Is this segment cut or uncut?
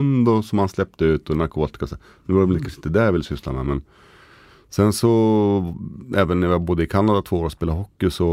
uncut